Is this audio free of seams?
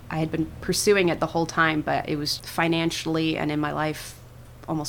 no; 1 cut; at 2.4 s

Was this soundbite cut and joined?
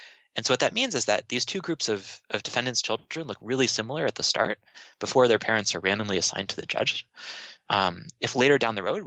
no; 0 cuts

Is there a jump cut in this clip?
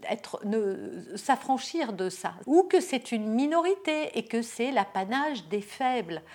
yes; 1 cut; at 2.4 s

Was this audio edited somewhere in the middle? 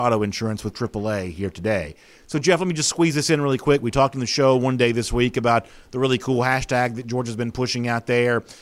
no; 0 cuts

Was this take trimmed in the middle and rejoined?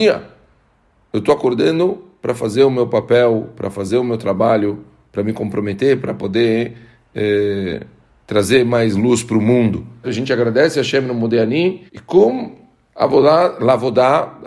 yes; 2 cuts; at 10.0 s, 11.9 s

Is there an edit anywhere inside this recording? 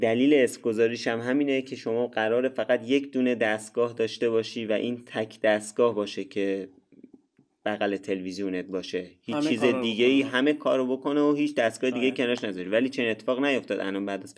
no; 0 cuts

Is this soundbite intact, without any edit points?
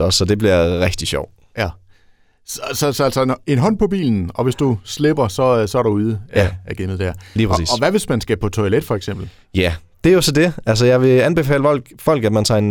yes; 0 cuts

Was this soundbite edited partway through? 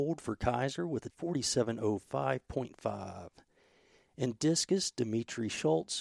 no; 0 cuts

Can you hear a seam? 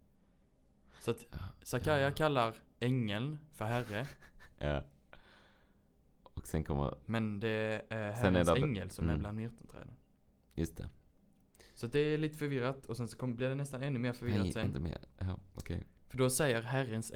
no; 0 cuts

